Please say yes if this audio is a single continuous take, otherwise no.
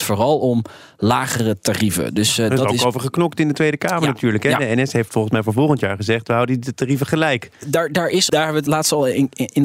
no